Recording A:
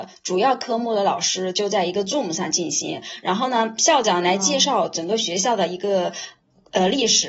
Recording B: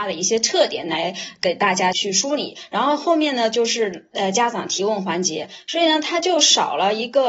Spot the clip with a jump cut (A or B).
B